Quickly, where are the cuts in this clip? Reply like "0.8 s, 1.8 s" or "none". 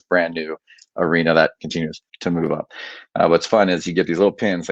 2.1 s